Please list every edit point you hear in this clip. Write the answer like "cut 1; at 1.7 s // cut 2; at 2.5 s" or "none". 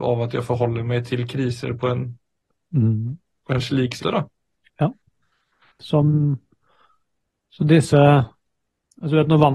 cut 1; at 4.0 s